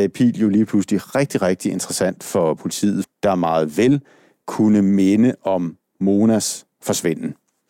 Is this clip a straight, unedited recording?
no; 1 cut; at 3.0 s

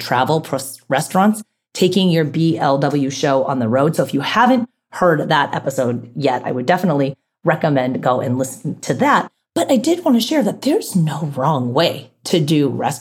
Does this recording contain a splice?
no; 0 cuts

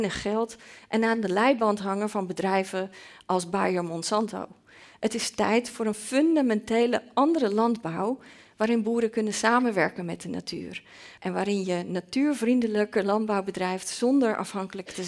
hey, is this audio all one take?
no; 1 cut; at 11.2 s

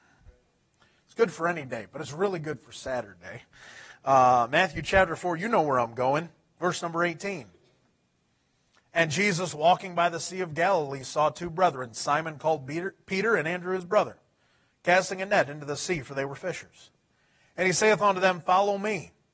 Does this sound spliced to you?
no; 0 cuts

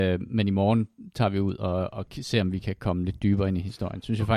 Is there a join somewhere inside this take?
no; 0 cuts

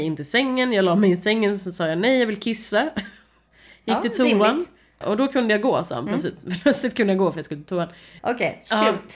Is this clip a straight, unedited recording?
no; 2 cuts; at 5.0 s, 8.2 s

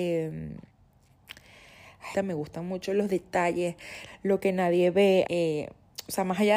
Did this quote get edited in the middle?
yes; 3 cuts; at 2.1 s, 4.1 s, 5.3 s

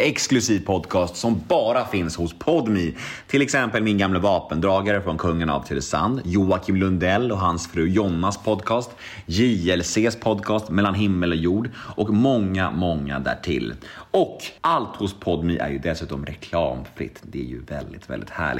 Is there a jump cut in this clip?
yes; 1 cut; at 14.6 s

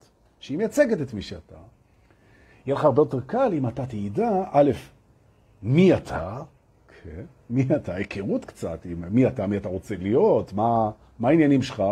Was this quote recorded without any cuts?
yes; 0 cuts

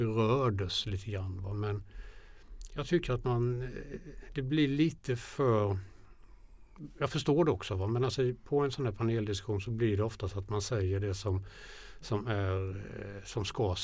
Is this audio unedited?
yes; 0 cuts

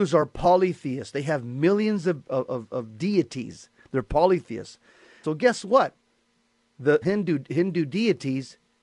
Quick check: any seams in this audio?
yes; 2 cuts; at 5.2 s, 7.0 s

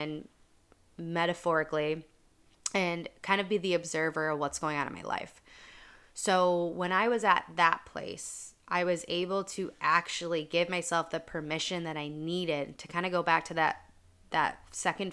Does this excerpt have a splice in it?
no; 0 cuts

